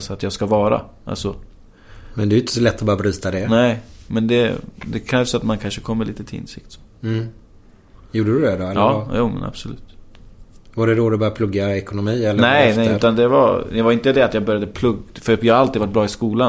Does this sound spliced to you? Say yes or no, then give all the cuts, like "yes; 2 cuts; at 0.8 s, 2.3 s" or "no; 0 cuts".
no; 0 cuts